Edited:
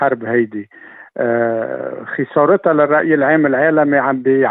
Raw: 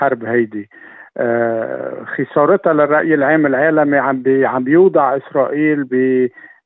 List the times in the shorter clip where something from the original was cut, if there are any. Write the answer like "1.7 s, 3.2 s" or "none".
none